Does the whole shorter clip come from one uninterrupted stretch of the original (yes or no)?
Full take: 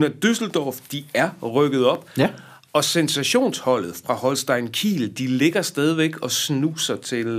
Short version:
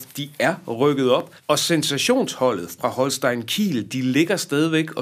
no